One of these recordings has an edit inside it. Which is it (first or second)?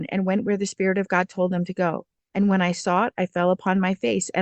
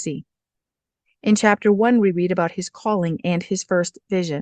first